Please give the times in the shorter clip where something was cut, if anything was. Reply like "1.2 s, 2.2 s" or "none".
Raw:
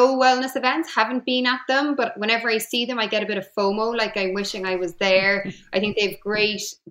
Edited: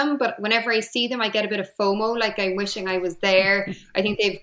none